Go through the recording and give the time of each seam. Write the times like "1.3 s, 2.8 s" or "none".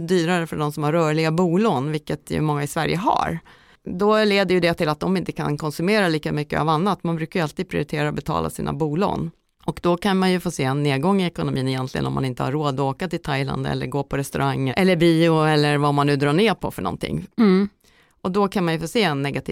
14.7 s, 17.3 s